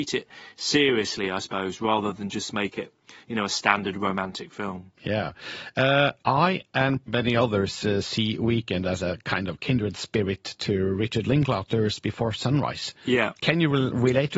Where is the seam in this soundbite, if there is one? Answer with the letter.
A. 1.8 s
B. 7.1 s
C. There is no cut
B